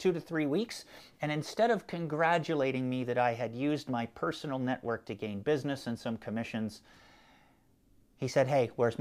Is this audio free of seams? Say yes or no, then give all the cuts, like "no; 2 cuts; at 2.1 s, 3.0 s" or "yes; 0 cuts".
yes; 0 cuts